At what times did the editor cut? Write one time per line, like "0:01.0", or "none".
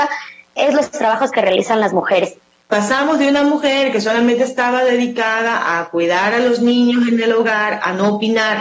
0:02.6